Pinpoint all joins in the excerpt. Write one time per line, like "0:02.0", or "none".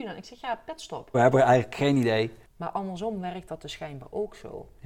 0:01.1
0:02.4